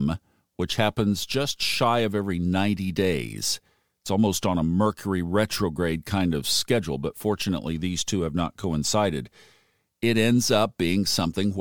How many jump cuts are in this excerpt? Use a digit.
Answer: 0